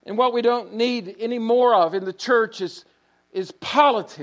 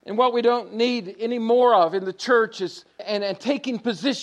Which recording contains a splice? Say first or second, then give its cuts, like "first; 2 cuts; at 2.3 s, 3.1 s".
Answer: second; 1 cut; at 3.0 s